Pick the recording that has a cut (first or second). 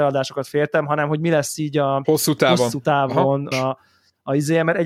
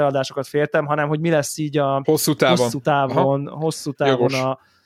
first